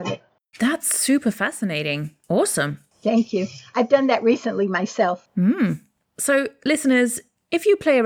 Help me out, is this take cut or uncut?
uncut